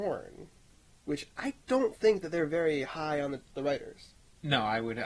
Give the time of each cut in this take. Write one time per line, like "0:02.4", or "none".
0:03.5

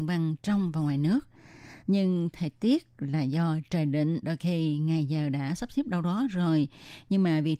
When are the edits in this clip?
0:01.8
0:04.2

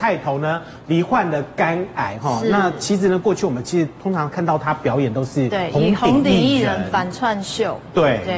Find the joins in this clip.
none

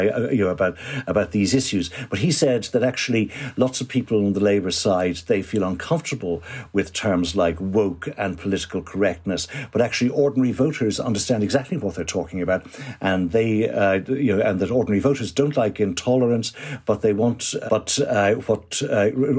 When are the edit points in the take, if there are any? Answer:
0:17.7

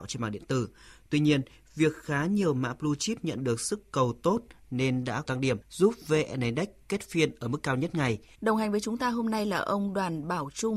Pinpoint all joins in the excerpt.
0:08.3

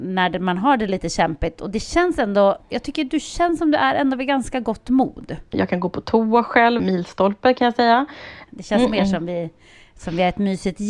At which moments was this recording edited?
0:05.5
0:06.8
0:08.5

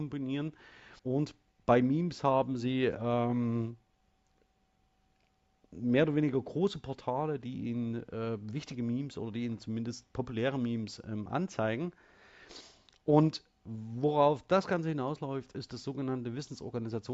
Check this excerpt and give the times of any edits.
0:01.0

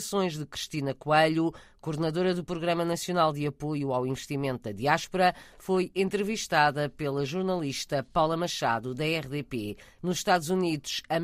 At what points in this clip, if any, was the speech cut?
0:10.0

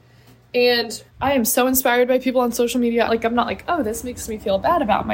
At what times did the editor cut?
0:01.1
0:03.1

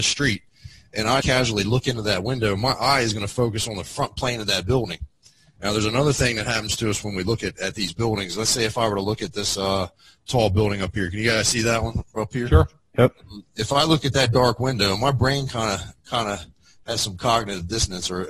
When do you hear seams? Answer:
0:01.2
0:05.6

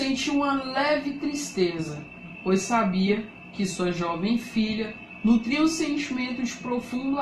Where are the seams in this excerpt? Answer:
none

